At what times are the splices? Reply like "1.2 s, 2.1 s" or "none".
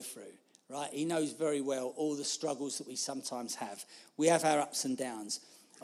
none